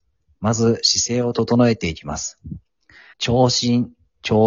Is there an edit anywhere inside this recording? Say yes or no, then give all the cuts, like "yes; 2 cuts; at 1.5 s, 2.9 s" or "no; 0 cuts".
yes; 1 cut; at 3.1 s